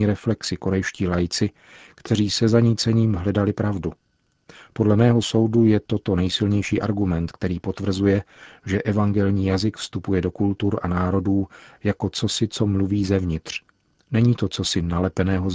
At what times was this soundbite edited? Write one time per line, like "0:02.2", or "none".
none

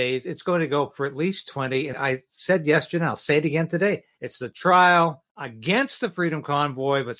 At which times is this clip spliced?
0:01.9
0:04.2
0:05.3

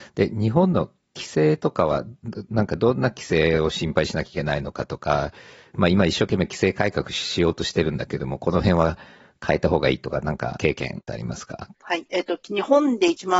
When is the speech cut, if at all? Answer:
none

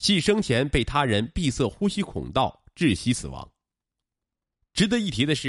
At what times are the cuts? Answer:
none

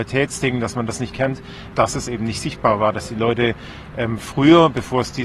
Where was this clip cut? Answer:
0:01.7

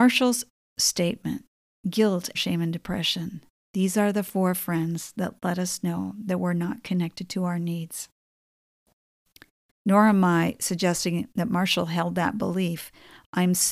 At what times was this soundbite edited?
0:02.3
0:09.7

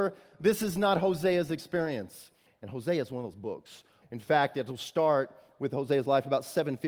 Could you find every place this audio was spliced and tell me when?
0:02.5
0:04.0

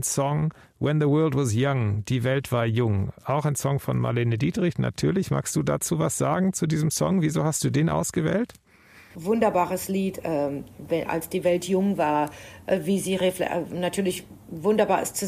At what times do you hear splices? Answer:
none

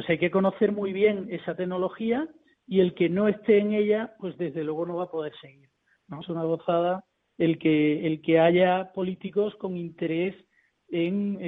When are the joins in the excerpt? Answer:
0:06.2

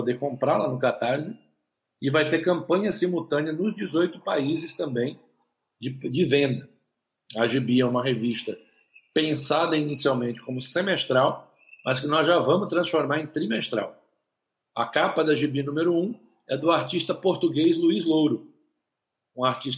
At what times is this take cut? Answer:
none

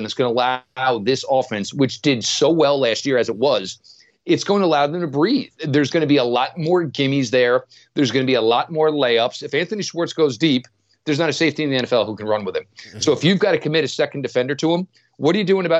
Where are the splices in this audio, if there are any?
none

